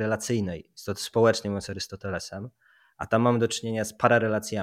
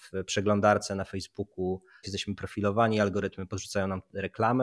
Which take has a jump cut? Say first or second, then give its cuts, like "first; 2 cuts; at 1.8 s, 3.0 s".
second; 1 cut; at 2.0 s